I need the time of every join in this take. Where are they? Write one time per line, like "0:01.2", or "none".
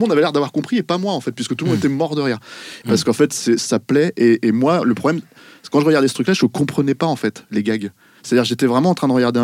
0:02.8

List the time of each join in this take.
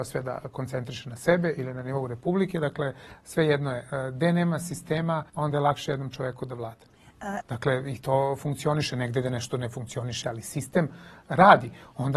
0:05.3
0:07.4
0:10.2

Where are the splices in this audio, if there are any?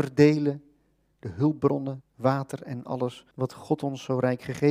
0:02.0
0:03.3

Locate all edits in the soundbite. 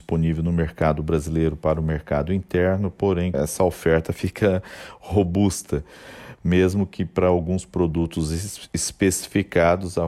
0:03.3

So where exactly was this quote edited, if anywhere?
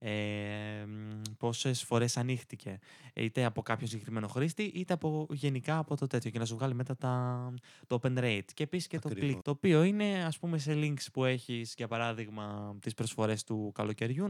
0:09.4

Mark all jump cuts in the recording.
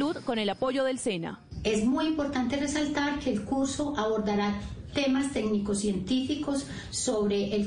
none

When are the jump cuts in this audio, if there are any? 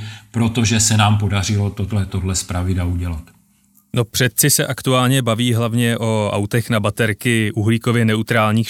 0:02.1

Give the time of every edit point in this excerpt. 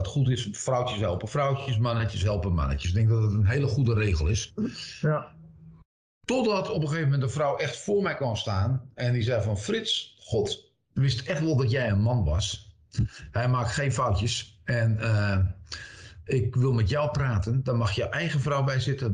none

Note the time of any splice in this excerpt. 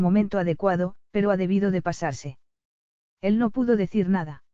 0:01.1
0:03.0

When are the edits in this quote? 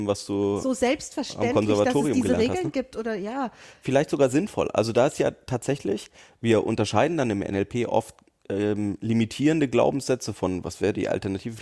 none

